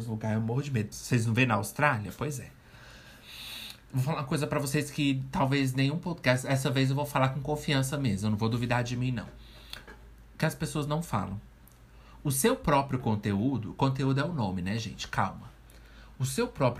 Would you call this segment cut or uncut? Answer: cut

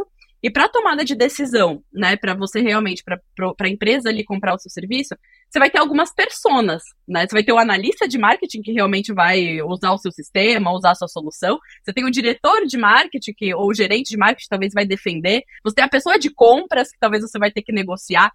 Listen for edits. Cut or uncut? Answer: uncut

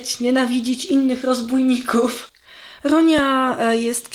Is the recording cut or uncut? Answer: uncut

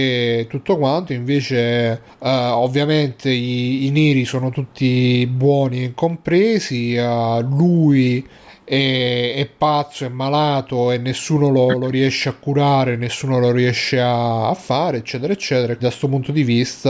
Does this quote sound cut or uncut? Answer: cut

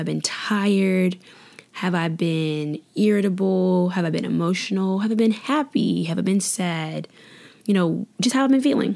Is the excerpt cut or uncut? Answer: uncut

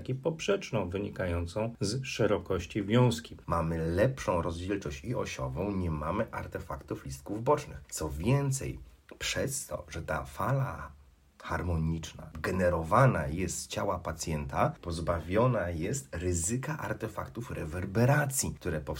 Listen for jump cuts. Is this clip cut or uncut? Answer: cut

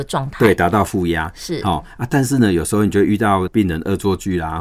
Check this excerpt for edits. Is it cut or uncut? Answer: uncut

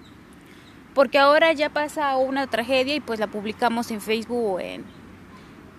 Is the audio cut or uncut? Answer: uncut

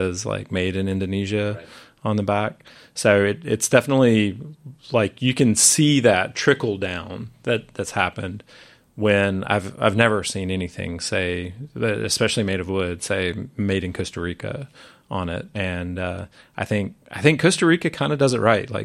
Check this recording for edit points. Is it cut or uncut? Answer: cut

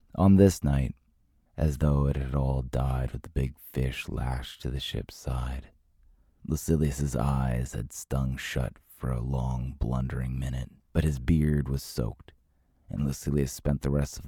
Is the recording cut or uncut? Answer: cut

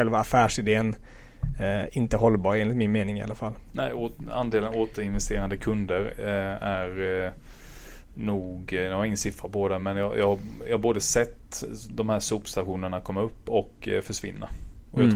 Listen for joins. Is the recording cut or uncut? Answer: uncut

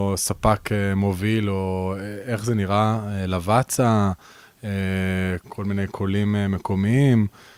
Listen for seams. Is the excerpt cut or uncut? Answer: cut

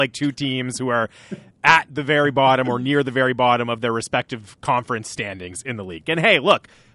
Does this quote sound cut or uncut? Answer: cut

